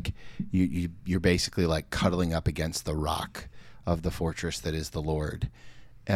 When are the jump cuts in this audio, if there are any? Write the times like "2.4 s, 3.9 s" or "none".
none